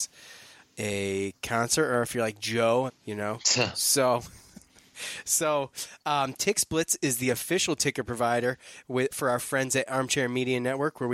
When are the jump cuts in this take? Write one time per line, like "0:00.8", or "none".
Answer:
0:02.9
0:09.1